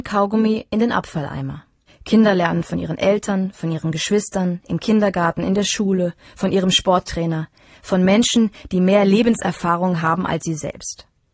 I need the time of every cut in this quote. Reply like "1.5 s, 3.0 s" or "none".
1.9 s

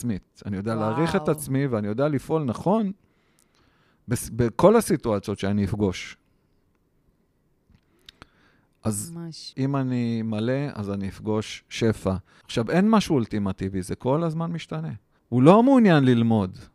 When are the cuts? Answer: 9.5 s, 12.4 s, 15.2 s

